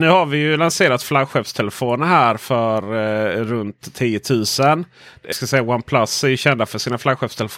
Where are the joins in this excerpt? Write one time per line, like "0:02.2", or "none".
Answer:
0:05.3